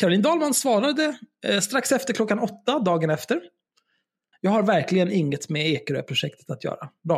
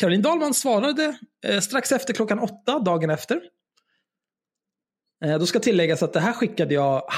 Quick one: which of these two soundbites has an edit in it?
first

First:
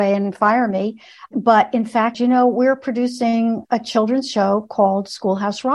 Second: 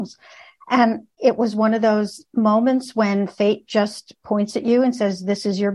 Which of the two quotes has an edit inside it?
first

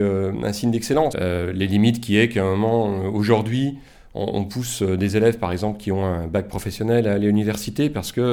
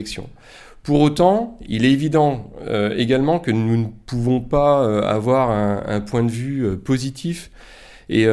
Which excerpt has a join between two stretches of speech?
first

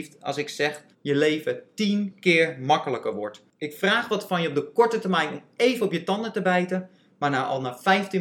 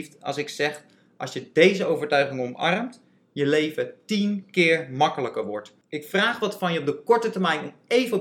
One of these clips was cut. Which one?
first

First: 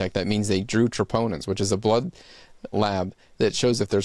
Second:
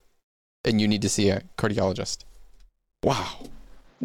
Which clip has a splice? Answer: first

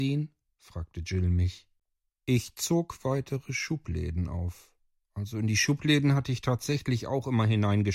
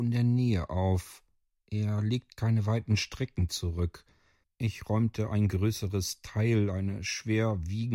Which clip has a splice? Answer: second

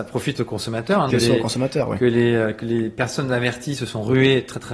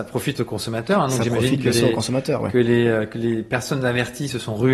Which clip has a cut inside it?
first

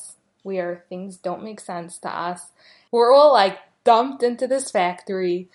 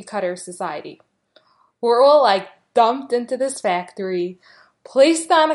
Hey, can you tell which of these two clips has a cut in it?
first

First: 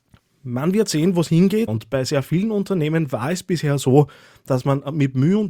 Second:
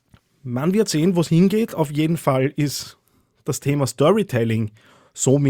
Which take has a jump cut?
first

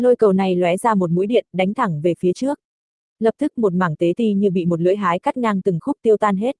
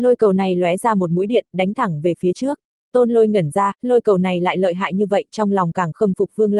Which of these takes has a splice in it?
second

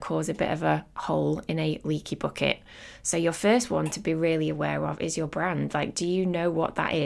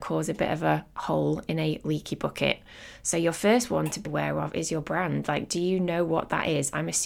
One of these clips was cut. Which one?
second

